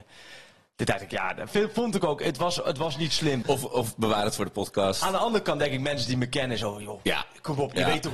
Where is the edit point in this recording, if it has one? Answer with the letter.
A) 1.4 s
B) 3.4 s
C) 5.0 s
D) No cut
B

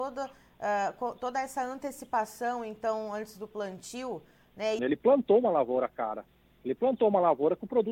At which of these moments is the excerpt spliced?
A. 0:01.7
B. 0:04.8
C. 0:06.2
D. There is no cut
B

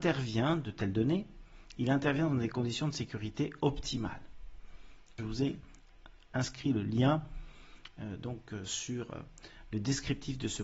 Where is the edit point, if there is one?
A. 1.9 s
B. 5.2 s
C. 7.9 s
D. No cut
B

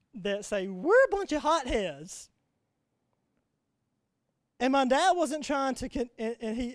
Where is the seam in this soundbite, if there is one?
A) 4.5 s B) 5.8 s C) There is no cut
C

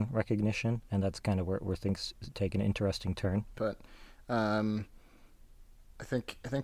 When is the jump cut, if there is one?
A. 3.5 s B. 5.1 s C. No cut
A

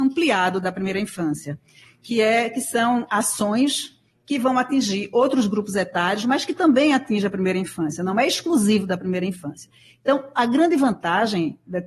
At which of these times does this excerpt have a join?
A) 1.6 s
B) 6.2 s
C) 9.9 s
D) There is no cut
D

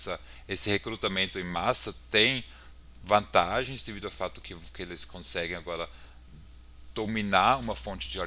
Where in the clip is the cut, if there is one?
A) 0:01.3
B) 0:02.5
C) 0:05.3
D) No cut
D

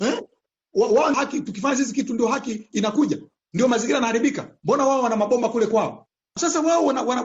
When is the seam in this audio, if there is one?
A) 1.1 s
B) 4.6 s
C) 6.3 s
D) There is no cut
A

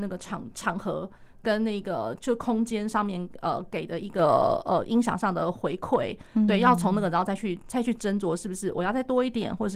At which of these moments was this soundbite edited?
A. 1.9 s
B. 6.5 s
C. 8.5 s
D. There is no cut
D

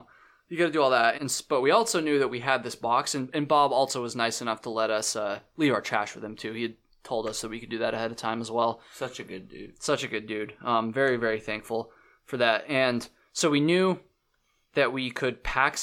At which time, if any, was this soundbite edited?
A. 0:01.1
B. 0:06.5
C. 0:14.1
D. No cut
A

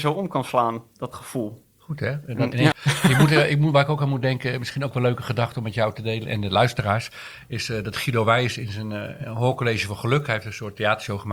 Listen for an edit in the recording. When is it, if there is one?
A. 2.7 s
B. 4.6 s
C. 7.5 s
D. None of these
A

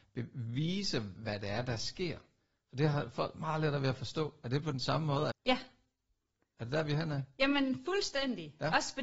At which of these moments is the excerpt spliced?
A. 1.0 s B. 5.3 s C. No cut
B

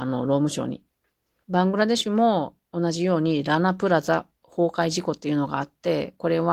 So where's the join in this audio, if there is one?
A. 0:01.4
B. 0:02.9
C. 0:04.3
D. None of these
A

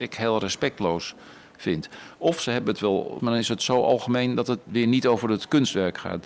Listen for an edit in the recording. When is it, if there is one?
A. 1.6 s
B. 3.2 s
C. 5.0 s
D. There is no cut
B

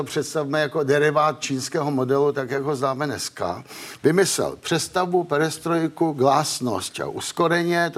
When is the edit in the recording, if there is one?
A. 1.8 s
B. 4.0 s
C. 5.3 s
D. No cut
B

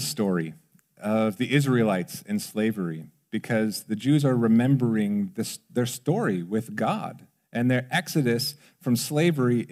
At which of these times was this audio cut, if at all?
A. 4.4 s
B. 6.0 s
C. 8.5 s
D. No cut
D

